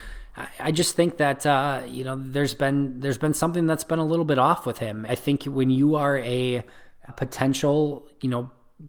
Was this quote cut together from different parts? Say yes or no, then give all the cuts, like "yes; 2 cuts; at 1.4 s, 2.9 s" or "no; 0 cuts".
yes; 2 cuts; at 5.1 s, 7.1 s